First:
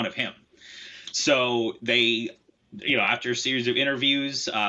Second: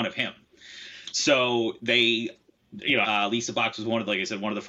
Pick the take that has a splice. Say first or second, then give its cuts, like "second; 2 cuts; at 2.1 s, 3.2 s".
second; 1 cut; at 3.0 s